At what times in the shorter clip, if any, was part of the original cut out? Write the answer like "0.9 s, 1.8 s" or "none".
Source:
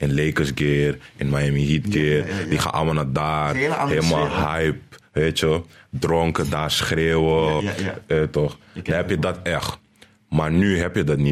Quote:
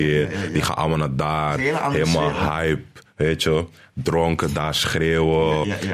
none